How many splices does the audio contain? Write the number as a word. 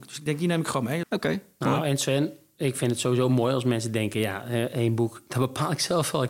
one